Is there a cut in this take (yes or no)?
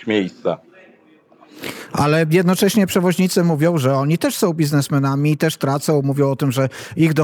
no